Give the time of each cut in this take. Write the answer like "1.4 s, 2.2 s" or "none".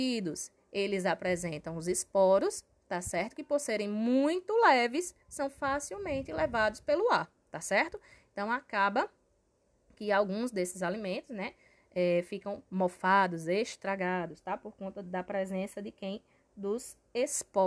none